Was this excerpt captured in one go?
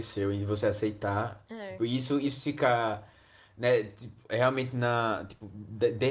yes; 0 cuts

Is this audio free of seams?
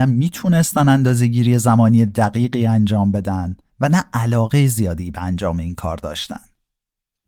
yes; 0 cuts

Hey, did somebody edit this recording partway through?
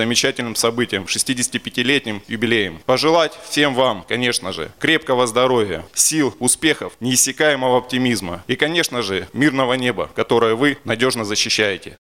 no; 0 cuts

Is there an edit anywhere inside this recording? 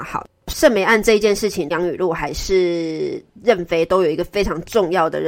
yes; 1 cut; at 1.7 s

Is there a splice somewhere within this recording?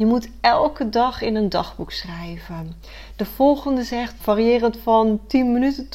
yes; 1 cut; at 4.2 s

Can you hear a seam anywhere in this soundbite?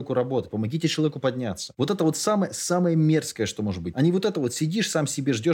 yes; 1 cut; at 3.9 s

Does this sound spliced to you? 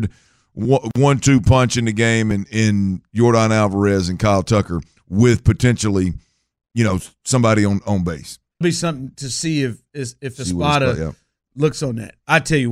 yes; 1 cut; at 8.6 s

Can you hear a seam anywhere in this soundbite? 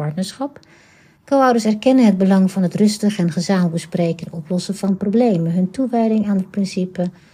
yes; 1 cut; at 1.1 s

